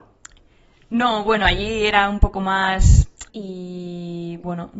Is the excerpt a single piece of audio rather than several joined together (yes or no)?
no